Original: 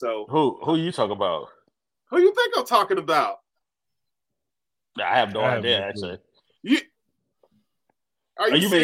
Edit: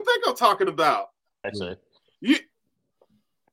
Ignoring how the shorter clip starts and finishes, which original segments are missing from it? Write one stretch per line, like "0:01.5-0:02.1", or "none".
0:03.7-0:05.9